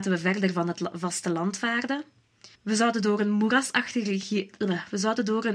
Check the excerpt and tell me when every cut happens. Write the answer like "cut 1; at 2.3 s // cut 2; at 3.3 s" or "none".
cut 1; at 2.5 s